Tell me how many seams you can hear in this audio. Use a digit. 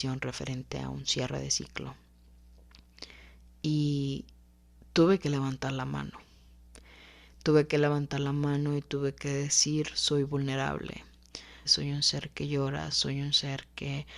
2